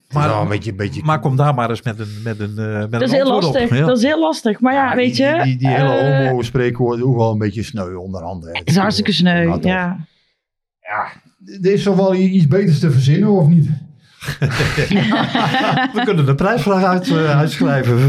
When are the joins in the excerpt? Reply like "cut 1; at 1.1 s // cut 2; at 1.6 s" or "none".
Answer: none